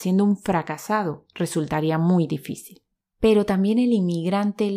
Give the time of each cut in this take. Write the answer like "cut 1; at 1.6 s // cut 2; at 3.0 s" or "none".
none

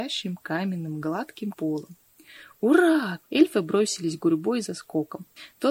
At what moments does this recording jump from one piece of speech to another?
cut 1; at 1.5 s // cut 2; at 3.2 s

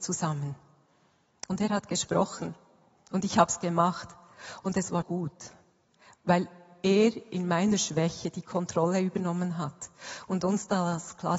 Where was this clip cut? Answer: cut 1; at 5.0 s

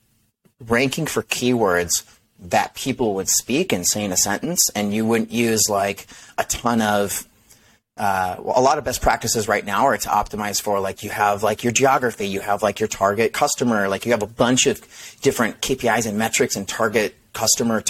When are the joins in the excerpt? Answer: none

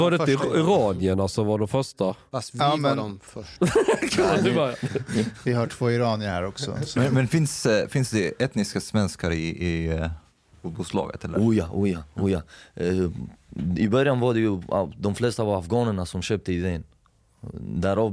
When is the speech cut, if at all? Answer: none

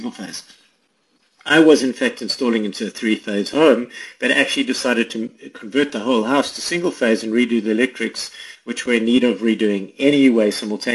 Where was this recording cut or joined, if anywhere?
none

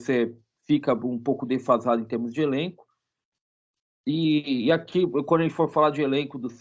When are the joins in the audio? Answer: none

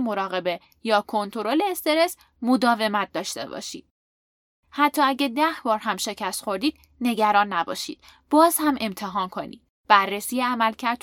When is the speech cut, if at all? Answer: none

